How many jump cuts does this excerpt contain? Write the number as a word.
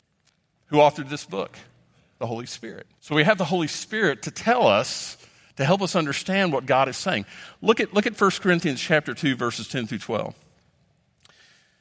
one